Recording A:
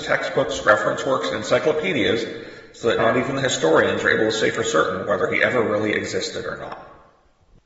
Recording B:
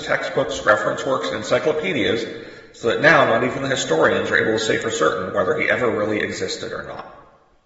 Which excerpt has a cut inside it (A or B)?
A